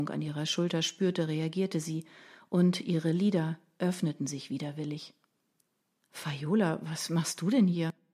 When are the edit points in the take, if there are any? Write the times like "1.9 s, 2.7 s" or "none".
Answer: none